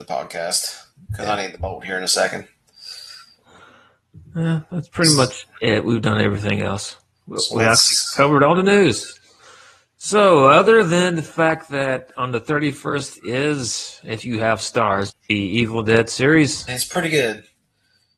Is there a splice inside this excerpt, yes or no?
yes